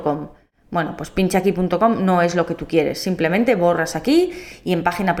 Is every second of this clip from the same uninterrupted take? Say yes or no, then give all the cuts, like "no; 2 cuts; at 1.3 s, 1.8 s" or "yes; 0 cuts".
yes; 0 cuts